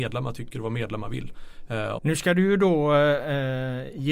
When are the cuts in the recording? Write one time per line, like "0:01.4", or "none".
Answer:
0:02.0